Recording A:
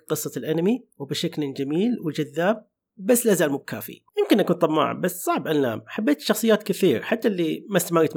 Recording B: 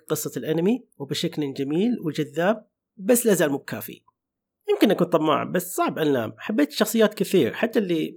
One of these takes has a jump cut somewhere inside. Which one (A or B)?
A